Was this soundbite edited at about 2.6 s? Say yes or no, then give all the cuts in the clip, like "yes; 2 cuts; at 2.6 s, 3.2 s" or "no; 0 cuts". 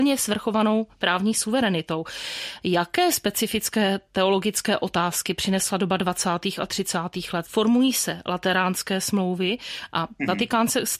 no; 1 cut; at 7.4 s